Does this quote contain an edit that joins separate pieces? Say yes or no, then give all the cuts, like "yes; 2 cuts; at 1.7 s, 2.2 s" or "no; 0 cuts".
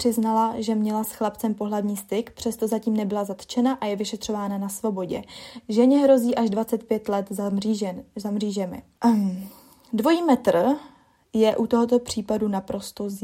yes; 1 cut; at 9.0 s